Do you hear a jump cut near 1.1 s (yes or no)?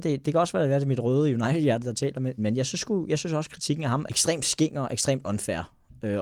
no